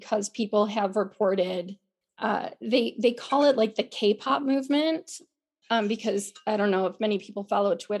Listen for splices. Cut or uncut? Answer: uncut